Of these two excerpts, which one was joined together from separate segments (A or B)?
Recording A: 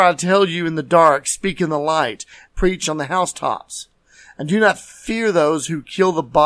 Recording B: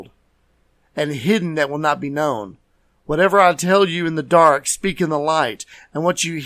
A